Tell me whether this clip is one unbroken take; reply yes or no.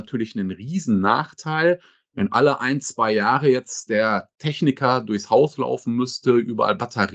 yes